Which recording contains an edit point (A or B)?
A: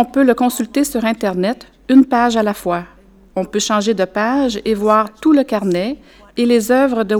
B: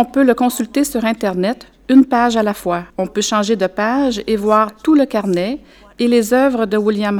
B